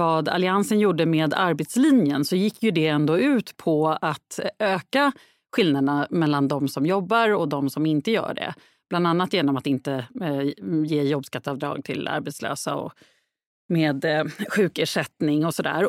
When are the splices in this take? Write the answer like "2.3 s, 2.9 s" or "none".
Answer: none